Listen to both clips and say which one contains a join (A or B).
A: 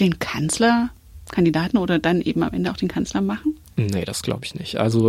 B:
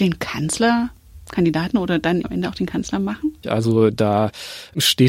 B